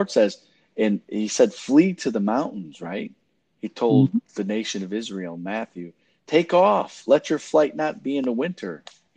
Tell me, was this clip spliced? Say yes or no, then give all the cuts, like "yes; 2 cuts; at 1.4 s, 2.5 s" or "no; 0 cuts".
yes; 1 cut; at 6.2 s